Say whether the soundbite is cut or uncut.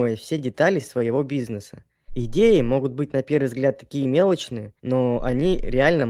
cut